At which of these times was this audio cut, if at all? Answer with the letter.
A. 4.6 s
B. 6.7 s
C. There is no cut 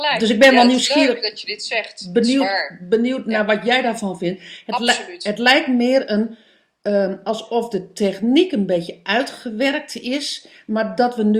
C